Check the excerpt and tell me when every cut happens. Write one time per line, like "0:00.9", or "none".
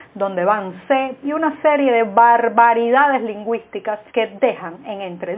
0:01.2
0:04.1